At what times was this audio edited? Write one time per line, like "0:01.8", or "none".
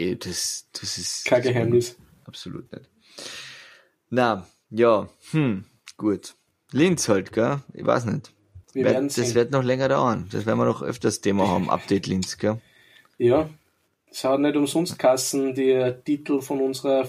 0:08.6